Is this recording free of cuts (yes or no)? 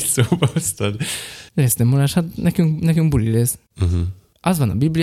yes